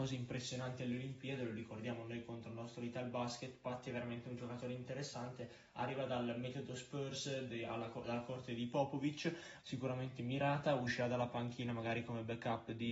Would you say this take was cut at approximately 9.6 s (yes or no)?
yes